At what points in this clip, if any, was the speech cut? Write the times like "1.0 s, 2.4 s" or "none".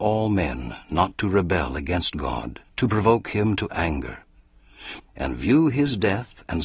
2.7 s, 5.0 s